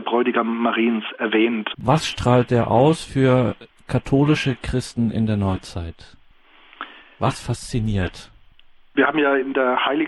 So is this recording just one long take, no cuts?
no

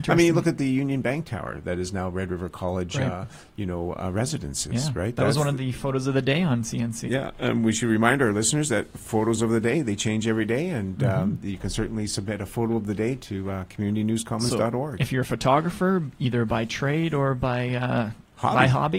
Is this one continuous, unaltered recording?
no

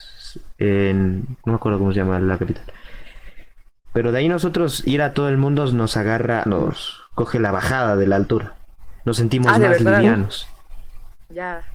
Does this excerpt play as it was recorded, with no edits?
no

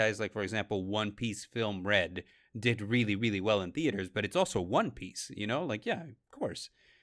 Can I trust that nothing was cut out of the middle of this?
yes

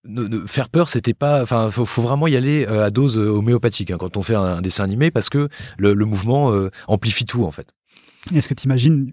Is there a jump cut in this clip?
no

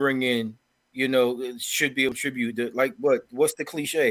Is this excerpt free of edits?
yes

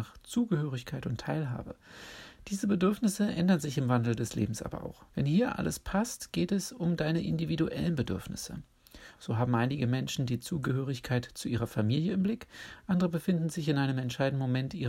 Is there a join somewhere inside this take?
yes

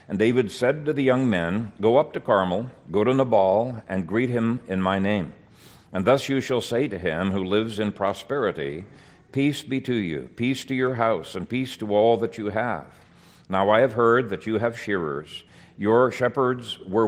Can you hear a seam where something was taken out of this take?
no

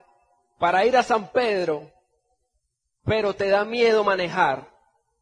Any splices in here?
yes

